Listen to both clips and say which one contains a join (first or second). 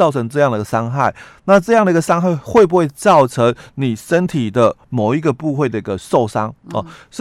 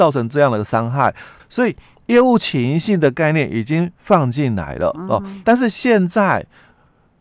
second